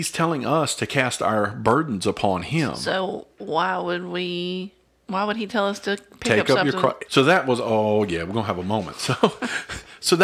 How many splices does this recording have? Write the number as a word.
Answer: one